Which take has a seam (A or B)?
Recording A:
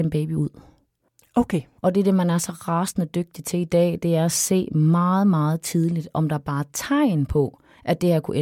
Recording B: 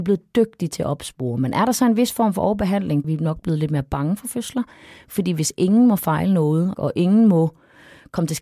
B